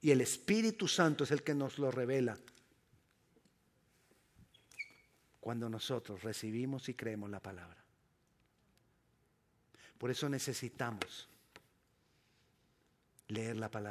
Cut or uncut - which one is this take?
uncut